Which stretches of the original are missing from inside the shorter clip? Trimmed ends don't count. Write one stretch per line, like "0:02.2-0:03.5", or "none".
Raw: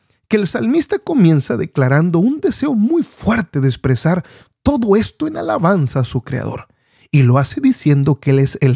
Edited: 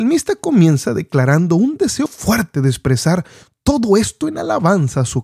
0:02.7-0:03.0

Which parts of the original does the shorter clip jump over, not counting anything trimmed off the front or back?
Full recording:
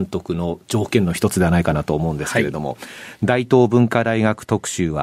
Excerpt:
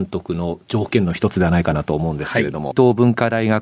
0:02.7-0:03.5

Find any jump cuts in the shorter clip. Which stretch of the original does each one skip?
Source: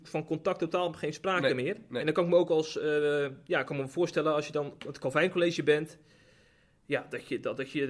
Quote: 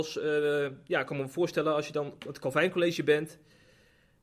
none

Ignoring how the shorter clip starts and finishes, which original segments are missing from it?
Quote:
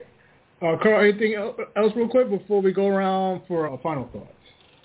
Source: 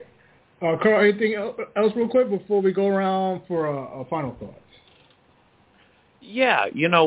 0:03.7-0:03.9

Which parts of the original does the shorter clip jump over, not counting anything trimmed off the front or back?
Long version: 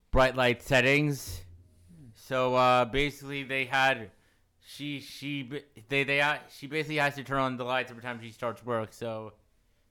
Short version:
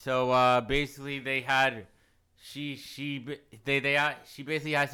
none

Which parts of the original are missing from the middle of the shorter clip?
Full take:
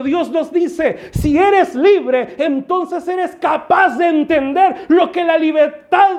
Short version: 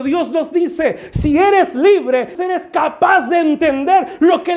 0:02.3-0:03.0

